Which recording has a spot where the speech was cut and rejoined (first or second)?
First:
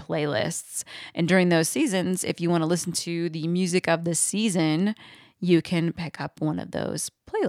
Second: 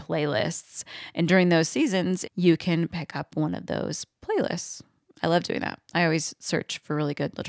second